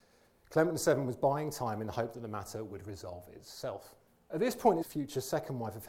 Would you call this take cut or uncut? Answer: cut